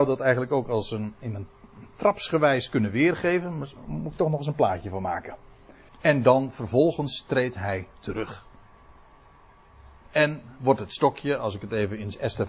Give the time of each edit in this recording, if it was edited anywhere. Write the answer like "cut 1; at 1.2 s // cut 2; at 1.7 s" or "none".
cut 1; at 5.9 s